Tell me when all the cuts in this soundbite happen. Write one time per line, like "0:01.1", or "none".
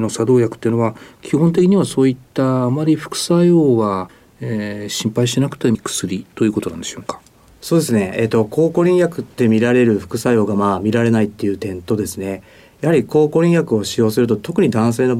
0:05.7